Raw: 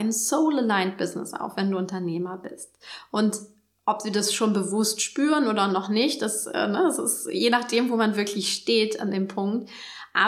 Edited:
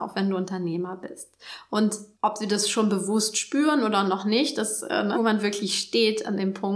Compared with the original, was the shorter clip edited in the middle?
yes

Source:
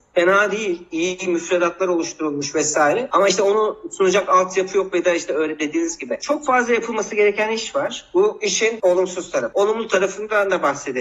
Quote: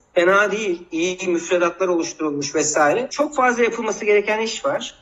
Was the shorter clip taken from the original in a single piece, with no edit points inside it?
no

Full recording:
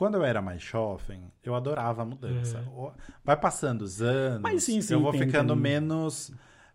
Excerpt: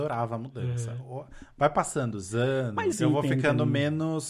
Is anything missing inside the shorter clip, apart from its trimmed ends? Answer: yes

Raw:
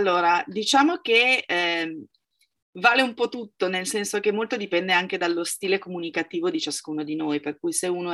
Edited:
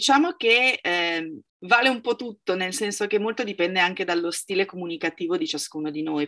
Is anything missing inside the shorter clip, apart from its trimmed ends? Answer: yes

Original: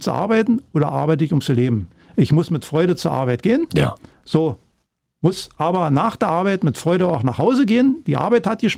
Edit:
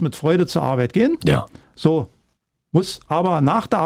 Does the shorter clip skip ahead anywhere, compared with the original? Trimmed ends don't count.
no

